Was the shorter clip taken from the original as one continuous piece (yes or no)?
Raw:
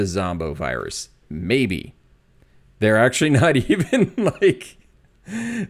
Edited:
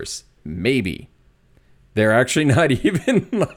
yes